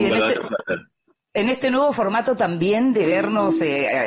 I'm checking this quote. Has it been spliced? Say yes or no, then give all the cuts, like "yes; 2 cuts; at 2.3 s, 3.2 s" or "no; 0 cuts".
no; 0 cuts